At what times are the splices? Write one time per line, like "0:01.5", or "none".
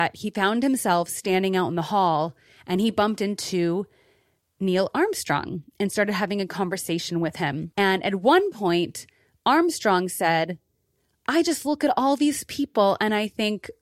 0:07.7